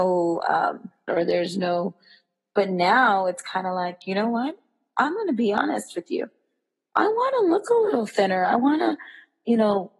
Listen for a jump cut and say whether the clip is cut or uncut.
cut